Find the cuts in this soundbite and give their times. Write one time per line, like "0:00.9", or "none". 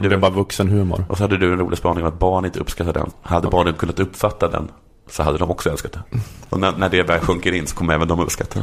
0:03.1
0:06.5